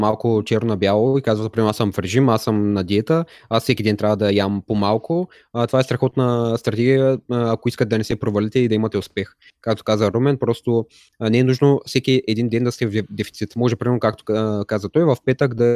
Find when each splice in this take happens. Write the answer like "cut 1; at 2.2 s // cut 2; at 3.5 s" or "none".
none